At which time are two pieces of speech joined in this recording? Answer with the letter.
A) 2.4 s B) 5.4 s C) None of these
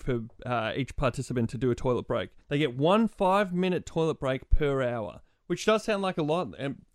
A